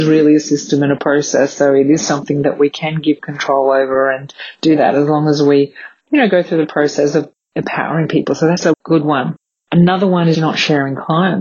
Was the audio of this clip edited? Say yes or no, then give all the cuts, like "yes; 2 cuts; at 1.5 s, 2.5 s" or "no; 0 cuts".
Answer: yes; 2 cuts; at 8.7 s, 10.3 s